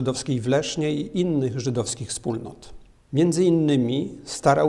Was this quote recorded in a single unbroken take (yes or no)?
no